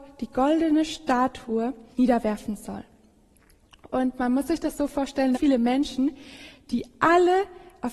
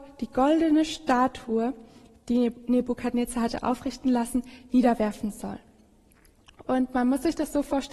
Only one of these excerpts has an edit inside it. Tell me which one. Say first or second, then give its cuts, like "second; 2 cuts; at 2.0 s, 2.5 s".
first; 2 cuts; at 1.9 s, 5.3 s